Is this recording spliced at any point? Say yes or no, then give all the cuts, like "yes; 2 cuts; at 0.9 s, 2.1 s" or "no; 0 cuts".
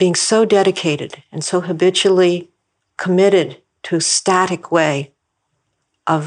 no; 0 cuts